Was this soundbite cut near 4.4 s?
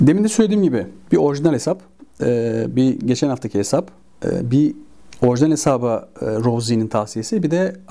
no; 0 cuts

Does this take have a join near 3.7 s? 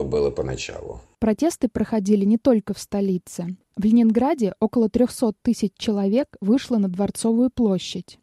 no; 0 cuts

